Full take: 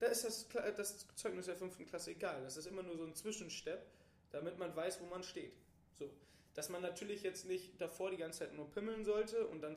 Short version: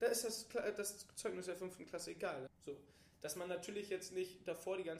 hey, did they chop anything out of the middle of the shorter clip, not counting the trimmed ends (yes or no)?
yes